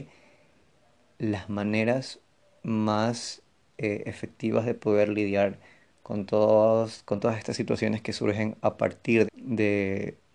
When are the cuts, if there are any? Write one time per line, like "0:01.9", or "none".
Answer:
0:09.2